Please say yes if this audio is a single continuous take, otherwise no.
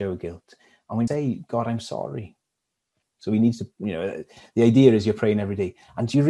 no